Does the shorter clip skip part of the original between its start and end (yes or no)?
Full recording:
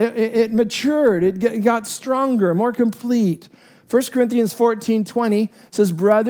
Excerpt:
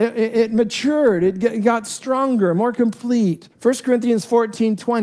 yes